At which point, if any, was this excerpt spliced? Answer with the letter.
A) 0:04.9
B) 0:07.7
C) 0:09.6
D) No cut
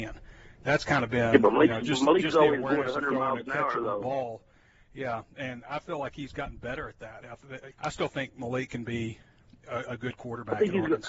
B